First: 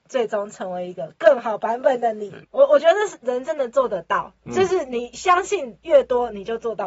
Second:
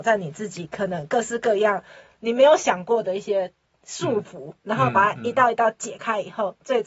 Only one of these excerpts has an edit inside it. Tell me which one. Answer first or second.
first